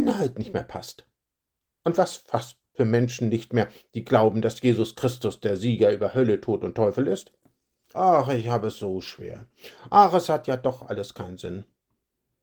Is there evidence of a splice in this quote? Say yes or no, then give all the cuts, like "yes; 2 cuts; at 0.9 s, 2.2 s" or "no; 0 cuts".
yes; 2 cuts; at 7.9 s, 9.9 s